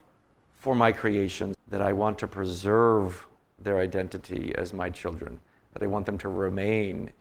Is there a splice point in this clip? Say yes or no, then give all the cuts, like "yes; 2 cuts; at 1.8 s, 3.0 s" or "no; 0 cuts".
yes; 1 cut; at 1.5 s